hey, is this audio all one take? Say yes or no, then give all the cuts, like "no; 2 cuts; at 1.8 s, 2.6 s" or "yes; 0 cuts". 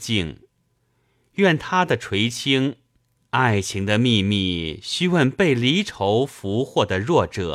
no; 1 cut; at 3.2 s